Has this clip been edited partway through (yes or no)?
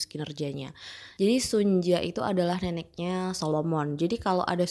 yes